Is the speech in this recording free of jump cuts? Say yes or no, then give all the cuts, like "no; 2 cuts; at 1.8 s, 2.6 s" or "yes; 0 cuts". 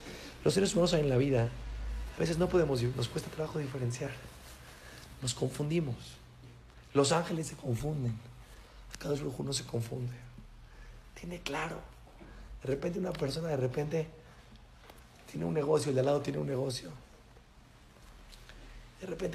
yes; 0 cuts